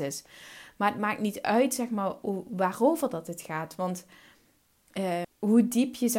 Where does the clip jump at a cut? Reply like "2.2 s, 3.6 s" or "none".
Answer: 5.2 s